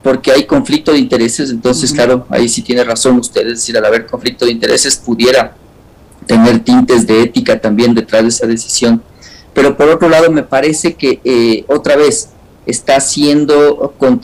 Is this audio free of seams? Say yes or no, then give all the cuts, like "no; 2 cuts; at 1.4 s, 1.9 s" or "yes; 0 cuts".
yes; 0 cuts